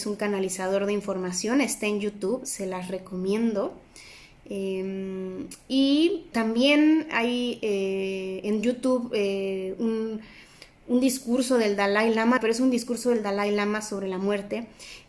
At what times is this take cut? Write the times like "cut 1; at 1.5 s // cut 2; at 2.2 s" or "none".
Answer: cut 1; at 6.3 s // cut 2; at 12.4 s